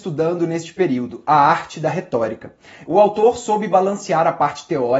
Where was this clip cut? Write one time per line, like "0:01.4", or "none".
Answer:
0:02.8